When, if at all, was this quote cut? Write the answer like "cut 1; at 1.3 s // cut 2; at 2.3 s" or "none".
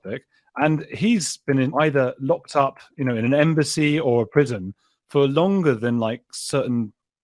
cut 1; at 1.7 s